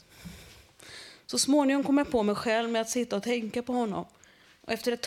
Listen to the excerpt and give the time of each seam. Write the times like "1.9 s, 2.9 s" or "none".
none